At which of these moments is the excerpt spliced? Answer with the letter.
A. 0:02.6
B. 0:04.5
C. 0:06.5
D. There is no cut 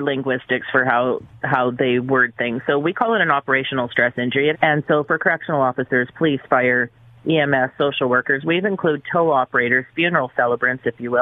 B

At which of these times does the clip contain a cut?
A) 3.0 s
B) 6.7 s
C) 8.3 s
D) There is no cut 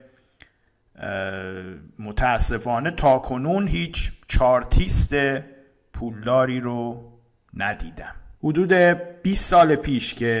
C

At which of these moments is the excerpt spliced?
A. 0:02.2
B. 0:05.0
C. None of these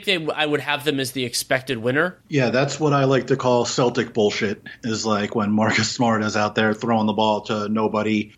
A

